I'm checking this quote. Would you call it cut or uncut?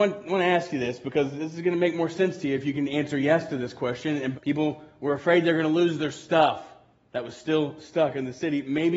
cut